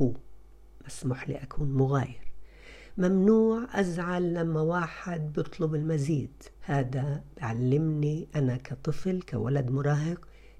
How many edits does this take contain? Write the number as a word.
one